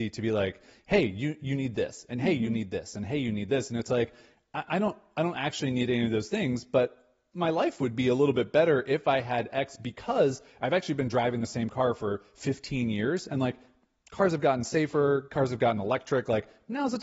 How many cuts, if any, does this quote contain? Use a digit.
0